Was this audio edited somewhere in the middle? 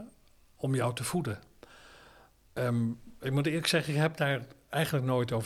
yes; 1 cut; at 2.5 s

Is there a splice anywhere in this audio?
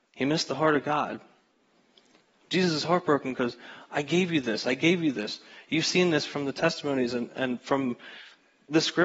no; 0 cuts

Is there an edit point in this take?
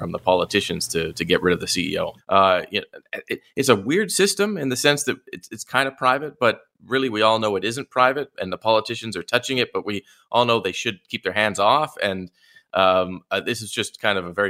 yes; 1 cut; at 2.2 s

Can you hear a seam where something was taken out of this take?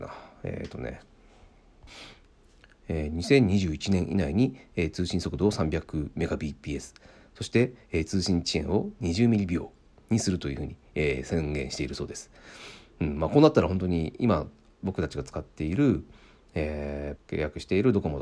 yes; 1 cut; at 17.2 s

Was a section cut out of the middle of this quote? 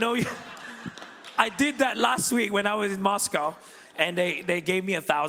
yes; 1 cut; at 1.4 s

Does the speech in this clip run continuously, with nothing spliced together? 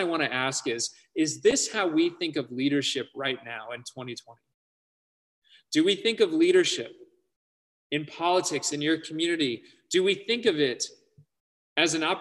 no; 1 cut; at 8.7 s

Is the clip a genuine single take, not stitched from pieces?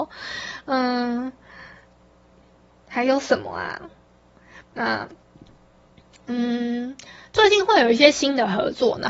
no; 1 cut; at 4.6 s

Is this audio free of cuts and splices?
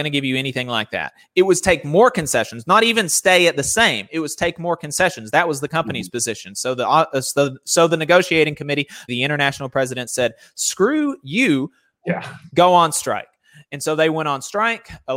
no; 1 cut; at 9.1 s

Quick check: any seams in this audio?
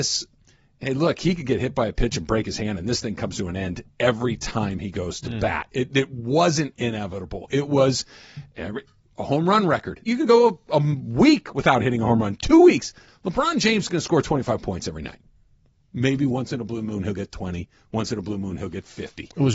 yes; 1 cut; at 10.1 s

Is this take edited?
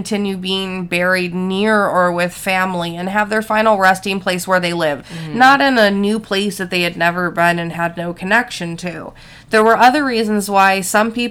yes; 1 cut; at 5.0 s

